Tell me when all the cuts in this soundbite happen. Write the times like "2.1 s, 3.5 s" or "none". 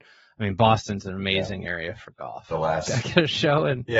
2.5 s